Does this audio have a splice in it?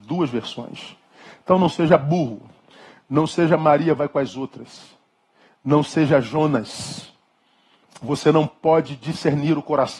no; 0 cuts

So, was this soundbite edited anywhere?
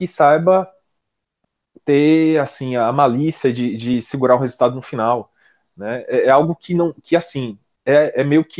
no; 0 cuts

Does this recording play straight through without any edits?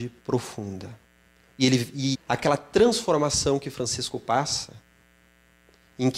no; 1 cut; at 2.1 s

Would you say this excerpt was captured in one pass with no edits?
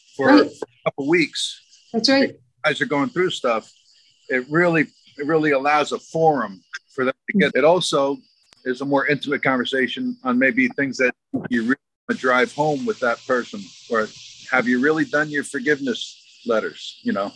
no; 1 cut; at 7.5 s

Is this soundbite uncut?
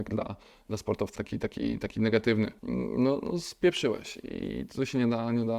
no; 2 cuts; at 1.1 s, 2.6 s

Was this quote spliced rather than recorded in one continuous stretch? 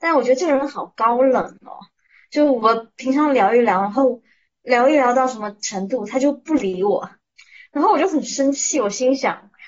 no; 0 cuts

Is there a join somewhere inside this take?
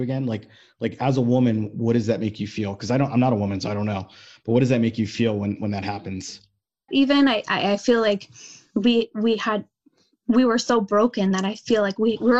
yes; 1 cut; at 6.9 s

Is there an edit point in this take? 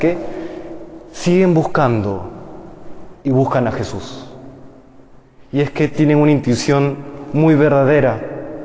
no; 0 cuts

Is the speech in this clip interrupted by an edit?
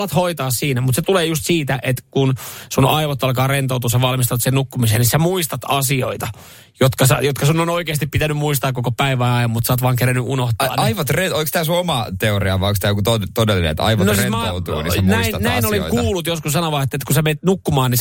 no; 0 cuts

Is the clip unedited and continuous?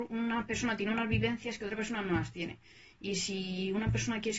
yes; 0 cuts

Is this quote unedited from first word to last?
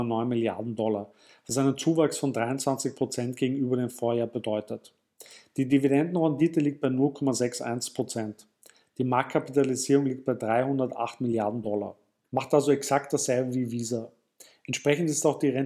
no; 1 cut; at 12.2 s

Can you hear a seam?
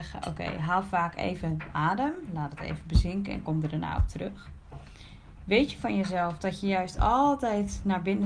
no; 0 cuts

